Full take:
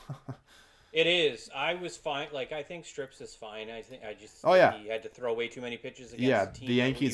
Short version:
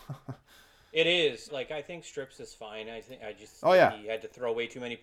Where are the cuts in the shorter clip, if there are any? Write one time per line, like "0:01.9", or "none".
0:01.5